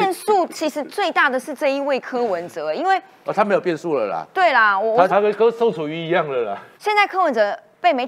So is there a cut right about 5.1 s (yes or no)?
yes